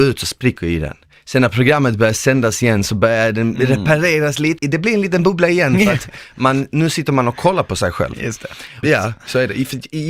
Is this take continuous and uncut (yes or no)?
no